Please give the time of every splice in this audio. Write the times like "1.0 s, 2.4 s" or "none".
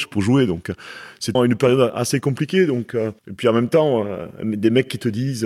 1.3 s, 3.2 s